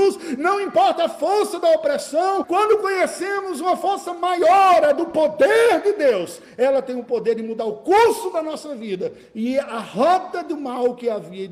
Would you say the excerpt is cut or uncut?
cut